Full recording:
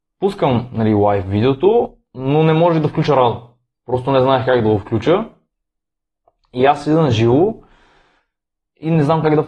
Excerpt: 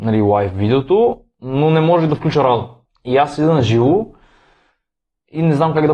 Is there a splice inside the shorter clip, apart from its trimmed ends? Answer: yes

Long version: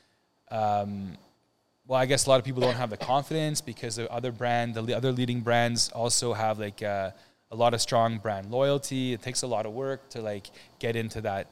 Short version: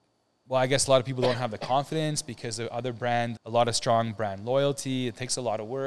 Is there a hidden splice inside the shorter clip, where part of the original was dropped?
yes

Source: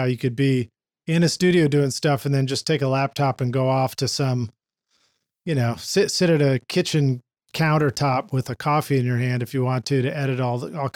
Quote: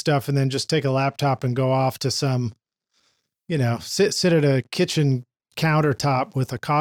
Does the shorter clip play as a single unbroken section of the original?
yes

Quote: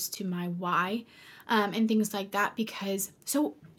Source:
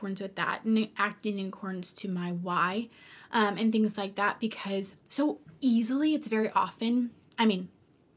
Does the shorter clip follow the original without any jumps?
yes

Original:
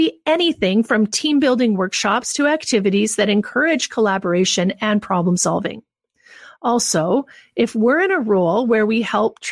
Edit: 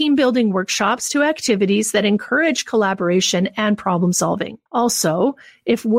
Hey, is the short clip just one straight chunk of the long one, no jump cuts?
no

